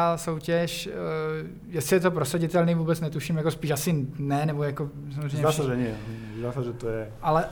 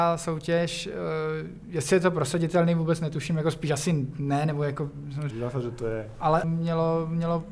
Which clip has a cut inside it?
second; 2 cuts; at 5.3 s, 6.4 s

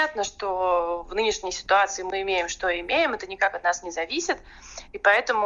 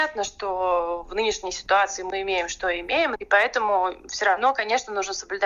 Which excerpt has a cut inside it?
second; 1 cut; at 3.2 s

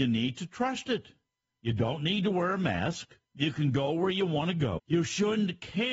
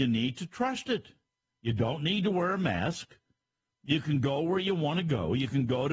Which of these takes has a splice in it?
first; 2 cuts; at 3.2 s, 4.8 s

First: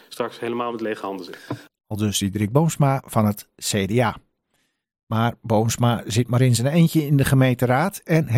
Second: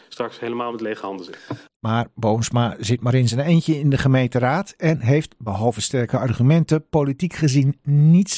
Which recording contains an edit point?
second; 1 cut; at 1.8 s

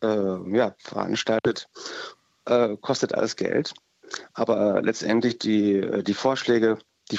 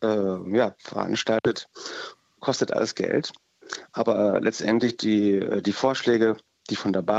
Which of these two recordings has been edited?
second; 1 cut; at 2.4 s

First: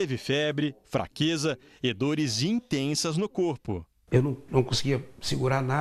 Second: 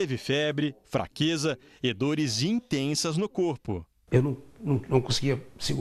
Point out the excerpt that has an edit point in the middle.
first; 1 cut; at 4.5 s

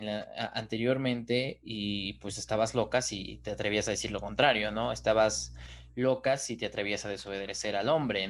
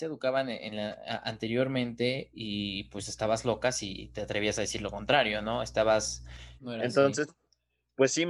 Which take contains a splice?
second; 1 cut; at 6.6 s

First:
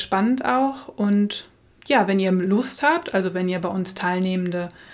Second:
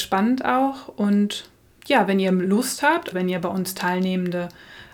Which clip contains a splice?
second; 1 cut; at 3.1 s

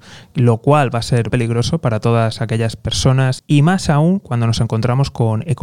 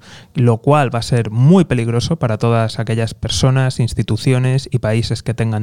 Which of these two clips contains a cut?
first; 2 cuts; at 1.3 s, 3.4 s

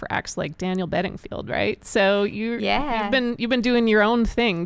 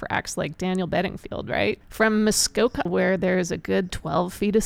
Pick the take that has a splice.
second; 2 cuts; at 1.8 s, 2.9 s

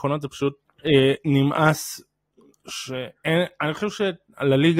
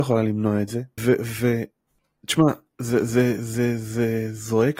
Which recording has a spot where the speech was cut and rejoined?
second; 1 cut; at 1.0 s

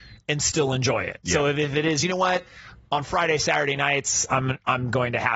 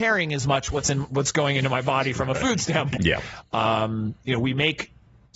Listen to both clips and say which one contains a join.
second; 1 cut; at 3.0 s

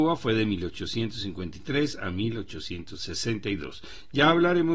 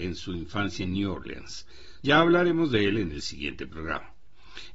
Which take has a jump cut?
second; 1 cut; at 2.0 s

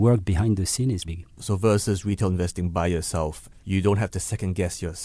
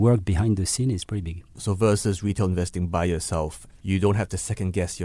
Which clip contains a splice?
first; 1 cut; at 1.0 s

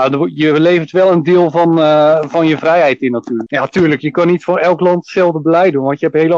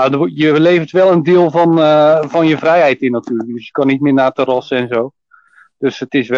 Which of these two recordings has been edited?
first; 1 cut; at 3.5 s

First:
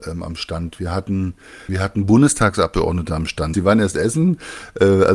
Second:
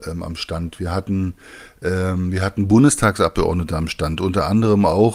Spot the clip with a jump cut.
first; 2 cuts; at 1.7 s, 3.5 s

